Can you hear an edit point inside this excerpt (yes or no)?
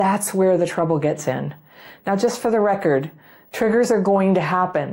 no